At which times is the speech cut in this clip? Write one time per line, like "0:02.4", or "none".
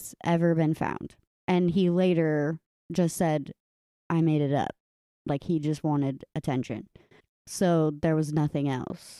0:01.3